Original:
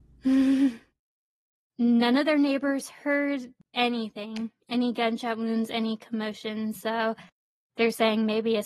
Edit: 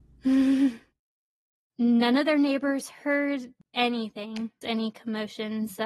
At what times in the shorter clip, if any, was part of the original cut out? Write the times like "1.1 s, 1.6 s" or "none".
4.6 s